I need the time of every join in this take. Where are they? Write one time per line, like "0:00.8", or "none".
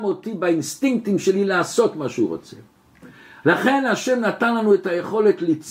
0:03.4